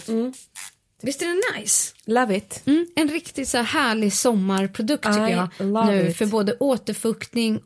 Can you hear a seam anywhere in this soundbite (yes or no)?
yes